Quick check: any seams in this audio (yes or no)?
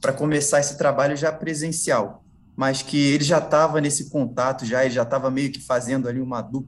no